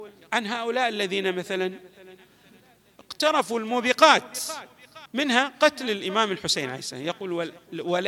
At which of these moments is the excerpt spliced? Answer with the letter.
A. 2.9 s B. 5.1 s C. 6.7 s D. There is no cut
B